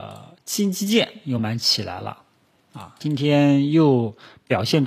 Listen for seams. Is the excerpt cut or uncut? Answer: cut